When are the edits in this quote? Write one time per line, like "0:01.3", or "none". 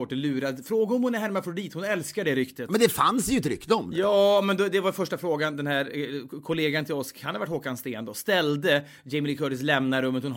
none